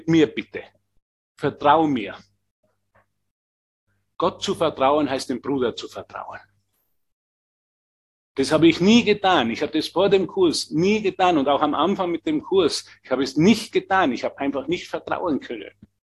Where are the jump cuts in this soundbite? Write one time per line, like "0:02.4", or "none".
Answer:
none